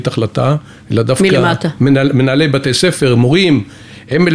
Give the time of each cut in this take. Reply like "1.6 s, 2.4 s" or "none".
none

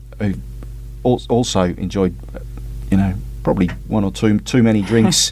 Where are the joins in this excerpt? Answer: none

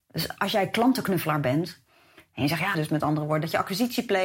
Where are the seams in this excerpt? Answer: 2.7 s

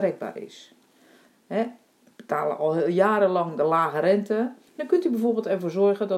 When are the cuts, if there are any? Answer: 1.3 s, 4.7 s

